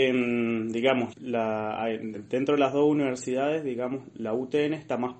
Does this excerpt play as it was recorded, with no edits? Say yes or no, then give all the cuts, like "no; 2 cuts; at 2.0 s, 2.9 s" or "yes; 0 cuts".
no; 1 cut; at 1.1 s